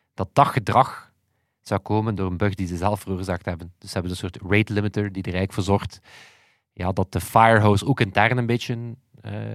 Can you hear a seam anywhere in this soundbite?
no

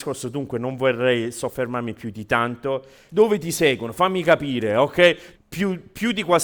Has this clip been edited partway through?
yes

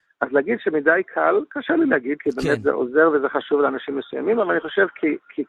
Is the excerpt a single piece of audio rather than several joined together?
yes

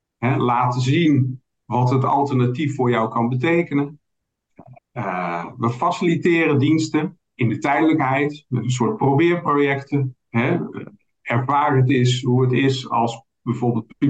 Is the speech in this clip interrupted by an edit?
yes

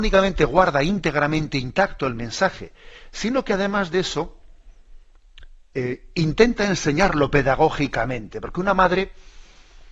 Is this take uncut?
yes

